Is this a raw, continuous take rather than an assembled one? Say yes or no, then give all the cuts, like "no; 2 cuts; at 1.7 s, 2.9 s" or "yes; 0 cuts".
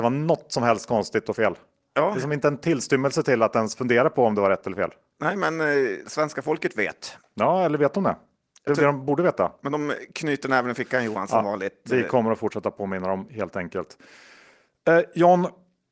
yes; 0 cuts